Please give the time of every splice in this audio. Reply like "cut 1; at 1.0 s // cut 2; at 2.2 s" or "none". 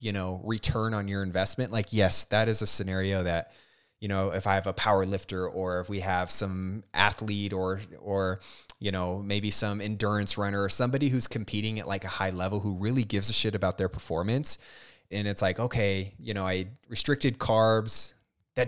cut 1; at 15.1 s

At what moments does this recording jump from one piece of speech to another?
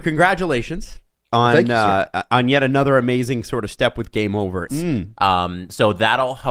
cut 1; at 4.7 s

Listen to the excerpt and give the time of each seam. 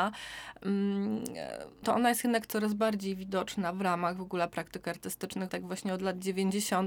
cut 1; at 1.8 s // cut 2; at 5.5 s

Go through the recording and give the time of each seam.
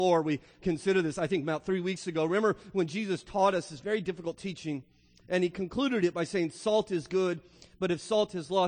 none

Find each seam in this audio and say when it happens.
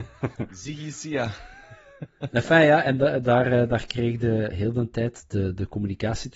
cut 1; at 4.5 s

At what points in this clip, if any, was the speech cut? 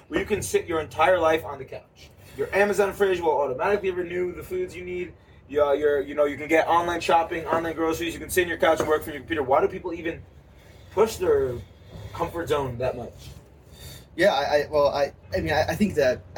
cut 1; at 15.2 s

